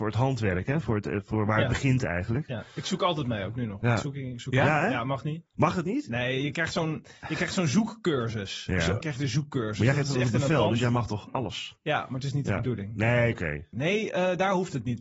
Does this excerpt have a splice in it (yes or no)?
yes